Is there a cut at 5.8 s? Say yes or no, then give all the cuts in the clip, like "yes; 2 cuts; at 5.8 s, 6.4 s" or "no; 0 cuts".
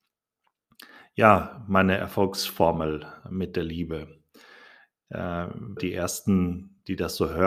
yes; 1 cut; at 5.8 s